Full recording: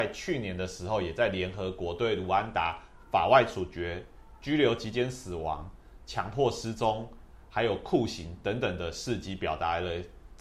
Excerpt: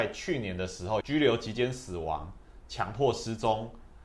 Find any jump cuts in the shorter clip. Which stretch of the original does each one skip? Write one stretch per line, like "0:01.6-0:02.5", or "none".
0:01.0-0:04.4